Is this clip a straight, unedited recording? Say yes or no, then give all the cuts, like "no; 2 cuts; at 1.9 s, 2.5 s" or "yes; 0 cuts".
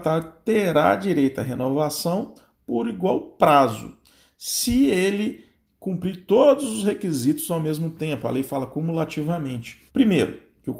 no; 1 cut; at 9.9 s